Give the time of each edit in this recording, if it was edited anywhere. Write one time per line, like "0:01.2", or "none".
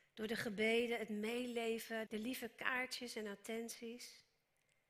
0:02.1